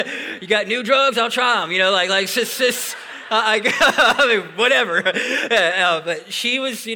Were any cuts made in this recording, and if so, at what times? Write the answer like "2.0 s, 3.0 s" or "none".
none